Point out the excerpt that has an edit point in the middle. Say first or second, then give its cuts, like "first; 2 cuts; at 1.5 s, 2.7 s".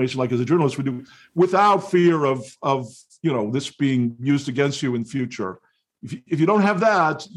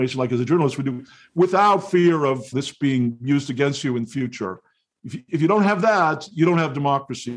second; 1 cut; at 2.5 s